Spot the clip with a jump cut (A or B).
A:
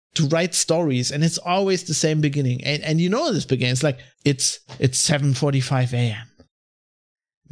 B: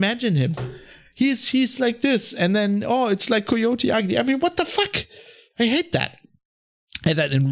A